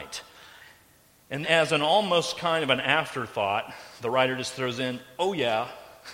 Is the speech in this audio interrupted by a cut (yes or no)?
yes